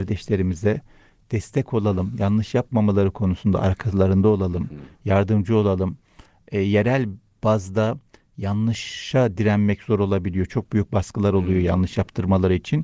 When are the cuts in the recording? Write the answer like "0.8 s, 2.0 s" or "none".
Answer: none